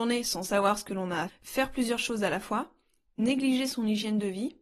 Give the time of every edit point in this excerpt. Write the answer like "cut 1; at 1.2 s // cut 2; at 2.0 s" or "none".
cut 1; at 1.3 s